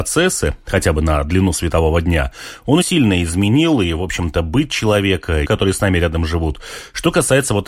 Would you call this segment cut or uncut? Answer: cut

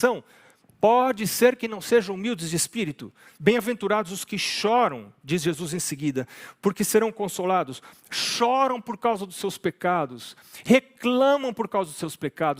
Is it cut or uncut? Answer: cut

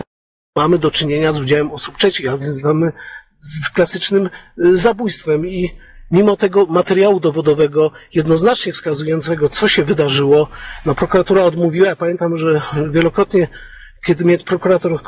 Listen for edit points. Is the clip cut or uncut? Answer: uncut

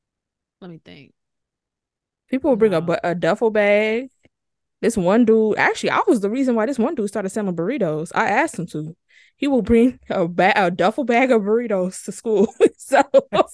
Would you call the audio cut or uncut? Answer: uncut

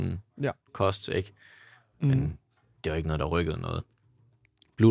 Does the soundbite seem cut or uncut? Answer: cut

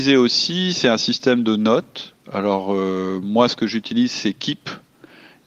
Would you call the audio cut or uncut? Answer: uncut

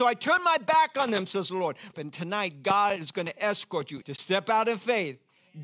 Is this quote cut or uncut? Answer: cut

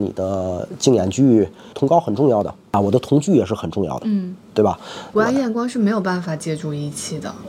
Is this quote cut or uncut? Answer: cut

